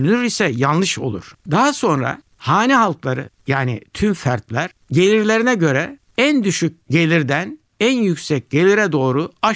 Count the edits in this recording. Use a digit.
1